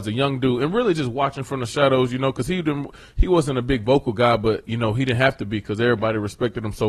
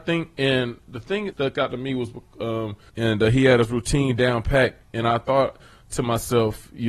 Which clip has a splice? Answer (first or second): second